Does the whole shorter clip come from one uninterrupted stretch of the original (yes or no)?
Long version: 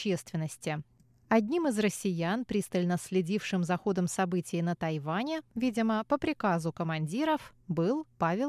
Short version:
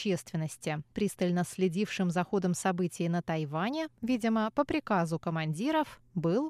no